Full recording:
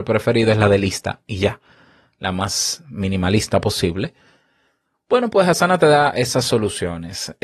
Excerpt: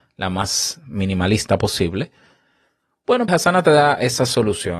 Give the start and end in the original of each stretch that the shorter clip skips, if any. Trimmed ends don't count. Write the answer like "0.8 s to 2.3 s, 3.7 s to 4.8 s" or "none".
5.3 s to 5.4 s